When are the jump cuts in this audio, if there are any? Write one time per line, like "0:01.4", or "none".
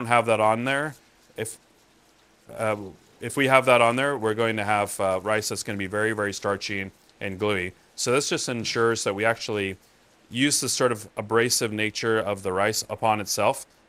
none